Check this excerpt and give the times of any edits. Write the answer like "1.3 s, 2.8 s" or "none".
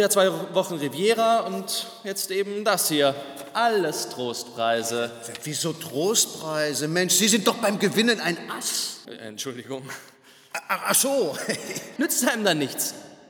9.0 s, 12.0 s

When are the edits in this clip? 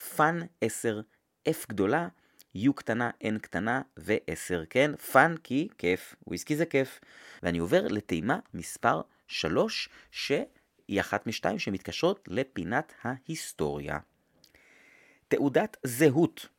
7.4 s

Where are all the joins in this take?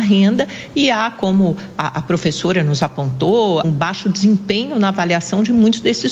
3.6 s

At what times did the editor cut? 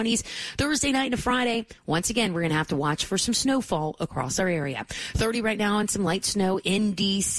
none

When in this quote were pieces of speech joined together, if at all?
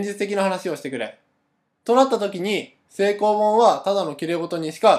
1.7 s

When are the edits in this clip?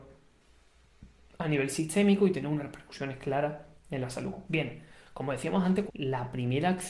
4.5 s, 5.9 s

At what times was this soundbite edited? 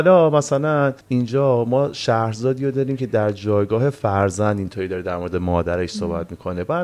1.0 s

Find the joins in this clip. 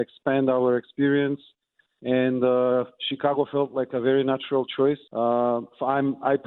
5.1 s

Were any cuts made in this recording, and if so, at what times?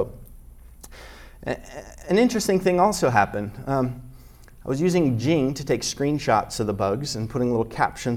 none

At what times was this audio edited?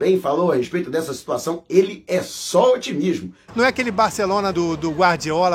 3.5 s, 4.5 s

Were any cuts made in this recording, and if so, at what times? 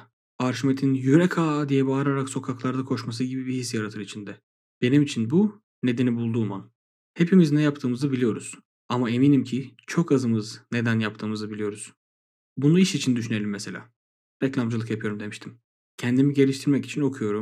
8.7 s

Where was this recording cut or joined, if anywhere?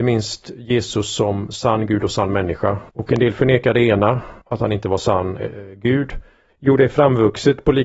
2.9 s, 4.4 s, 6.5 s

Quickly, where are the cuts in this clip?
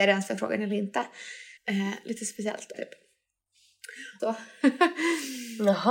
1.6 s, 2.7 s, 4.2 s

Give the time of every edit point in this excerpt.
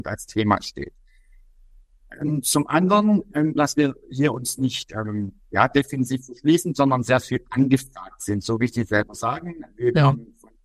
3.6 s

